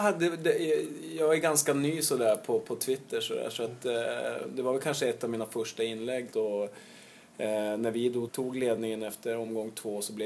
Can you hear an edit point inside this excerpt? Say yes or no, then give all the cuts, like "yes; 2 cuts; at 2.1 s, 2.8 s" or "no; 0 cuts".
yes; 2 cuts; at 6.3 s, 8.3 s